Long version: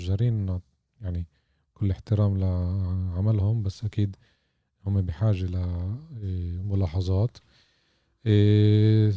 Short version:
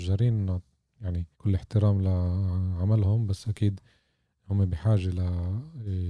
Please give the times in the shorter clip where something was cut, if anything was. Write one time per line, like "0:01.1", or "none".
0:01.3